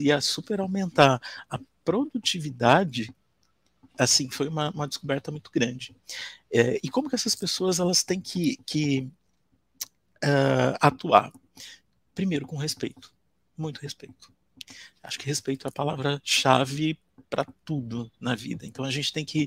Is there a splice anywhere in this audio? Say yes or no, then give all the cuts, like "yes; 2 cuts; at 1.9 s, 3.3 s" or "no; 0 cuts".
no; 0 cuts